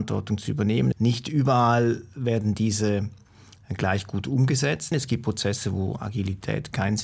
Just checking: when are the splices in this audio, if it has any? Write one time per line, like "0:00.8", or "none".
0:00.9
0:04.9